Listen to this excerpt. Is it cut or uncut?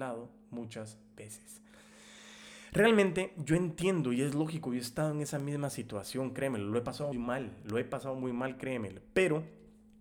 cut